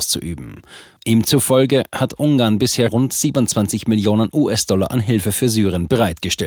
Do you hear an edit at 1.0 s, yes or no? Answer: no